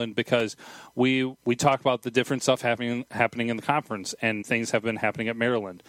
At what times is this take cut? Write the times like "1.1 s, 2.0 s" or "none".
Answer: 1.4 s, 4.4 s